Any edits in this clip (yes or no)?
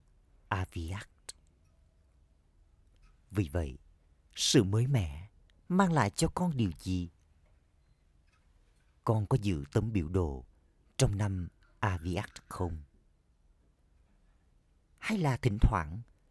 no